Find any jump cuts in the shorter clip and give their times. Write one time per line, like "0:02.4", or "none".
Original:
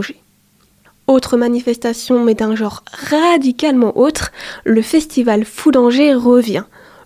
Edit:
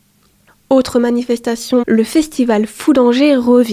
0:01.8